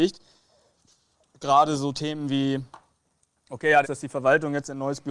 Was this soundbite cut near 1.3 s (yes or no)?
no